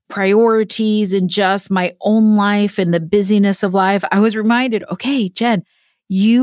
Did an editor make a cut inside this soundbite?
no; 0 cuts

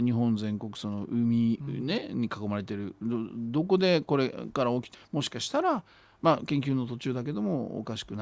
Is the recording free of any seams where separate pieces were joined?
no; 1 cut; at 4.9 s

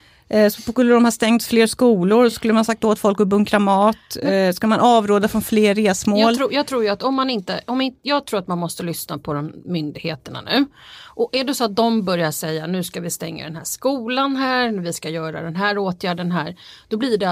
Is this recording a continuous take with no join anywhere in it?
yes; 0 cuts

